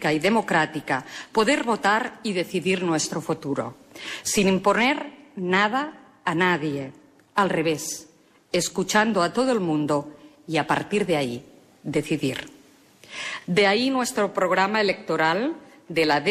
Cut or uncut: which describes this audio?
uncut